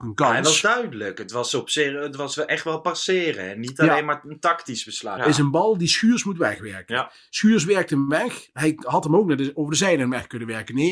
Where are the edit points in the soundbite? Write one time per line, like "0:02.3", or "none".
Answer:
0:05.2